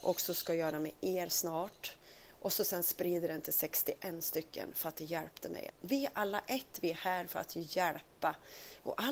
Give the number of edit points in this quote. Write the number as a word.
one